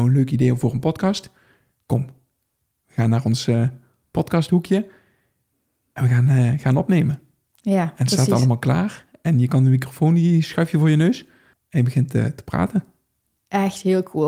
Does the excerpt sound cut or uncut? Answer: uncut